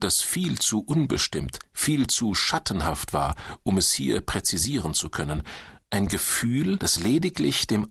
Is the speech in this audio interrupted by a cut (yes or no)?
yes